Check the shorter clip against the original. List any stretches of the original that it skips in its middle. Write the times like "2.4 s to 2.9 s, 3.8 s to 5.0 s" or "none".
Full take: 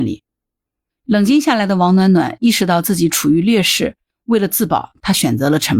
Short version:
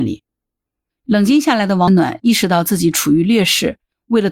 1.9 s to 2.1 s